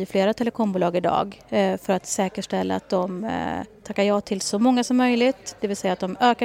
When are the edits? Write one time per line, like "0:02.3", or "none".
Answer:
none